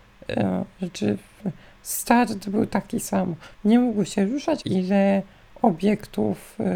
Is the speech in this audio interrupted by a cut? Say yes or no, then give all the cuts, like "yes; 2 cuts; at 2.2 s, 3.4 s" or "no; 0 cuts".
yes; 2 cuts; at 3.5 s, 4.6 s